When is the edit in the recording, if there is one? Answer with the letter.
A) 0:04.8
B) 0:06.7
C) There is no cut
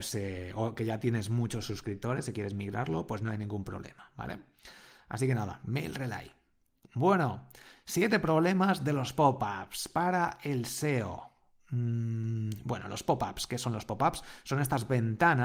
C